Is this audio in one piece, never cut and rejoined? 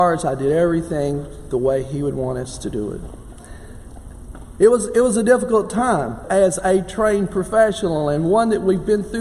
no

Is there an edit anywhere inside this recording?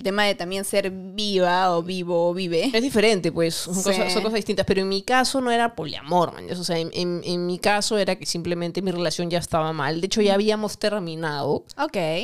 no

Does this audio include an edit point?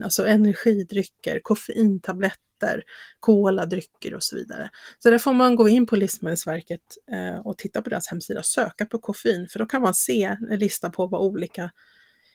no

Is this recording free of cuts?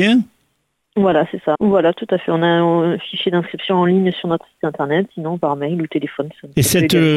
no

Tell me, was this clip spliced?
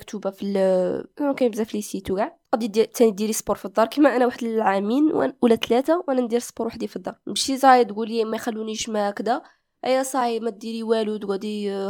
no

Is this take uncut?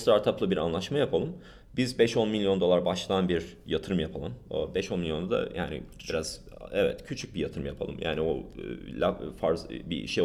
yes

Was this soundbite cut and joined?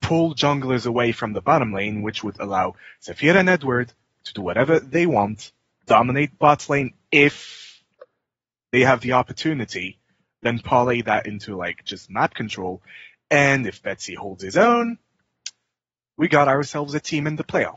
no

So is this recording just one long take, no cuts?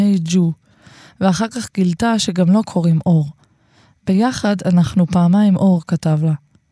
yes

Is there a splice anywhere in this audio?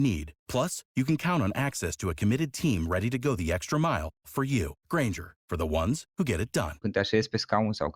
yes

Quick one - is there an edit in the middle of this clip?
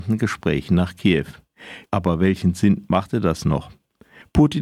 yes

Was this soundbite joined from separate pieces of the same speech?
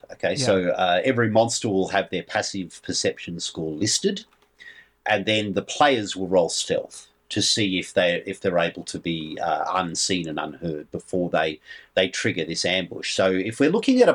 no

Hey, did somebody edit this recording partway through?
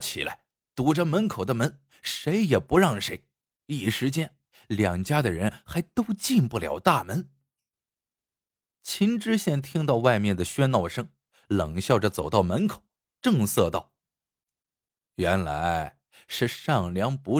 no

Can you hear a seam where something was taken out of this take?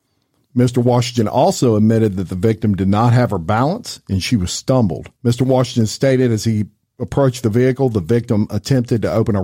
yes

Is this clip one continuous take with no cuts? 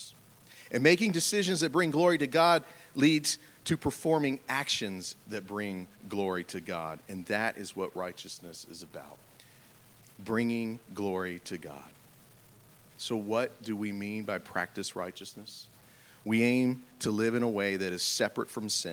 yes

